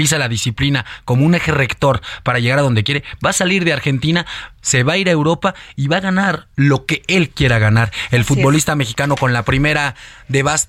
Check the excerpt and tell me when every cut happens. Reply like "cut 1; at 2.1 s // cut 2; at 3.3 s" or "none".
none